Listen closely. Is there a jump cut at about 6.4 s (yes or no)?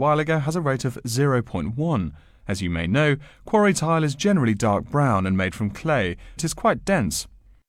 yes